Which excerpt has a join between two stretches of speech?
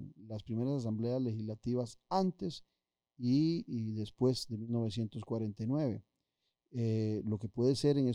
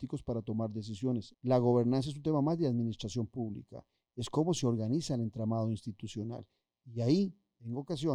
second; 1 cut; at 1.3 s

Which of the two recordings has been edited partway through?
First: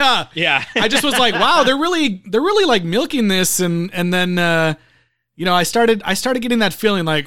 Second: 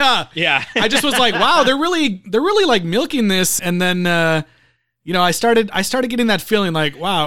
second; 1 cut; at 3.6 s

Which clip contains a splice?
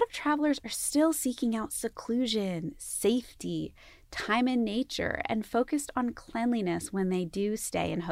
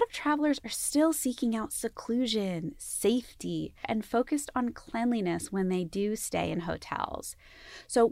second; 1 cut; at 3.8 s

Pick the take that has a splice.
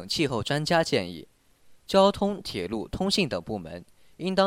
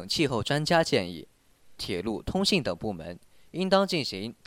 second; 1 cut; at 1.8 s

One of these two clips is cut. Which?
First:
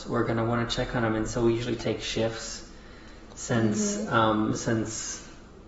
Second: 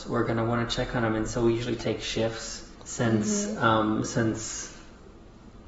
second; 1 cut; at 2.7 s

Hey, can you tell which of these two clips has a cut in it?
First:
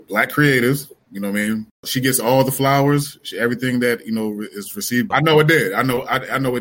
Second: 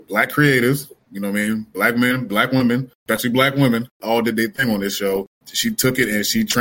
first; 2 cuts; at 1.7 s, 5.1 s

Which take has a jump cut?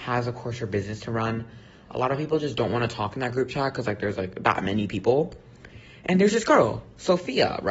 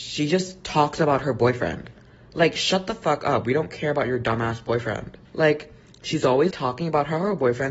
second; 2 cuts; at 5.3 s, 6.5 s

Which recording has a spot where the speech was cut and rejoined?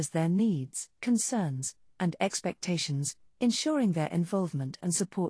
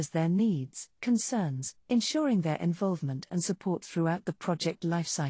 second; 1 cut; at 1.8 s

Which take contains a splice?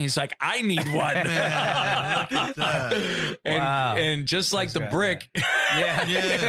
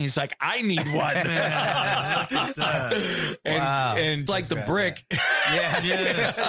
second; 1 cut; at 4.3 s

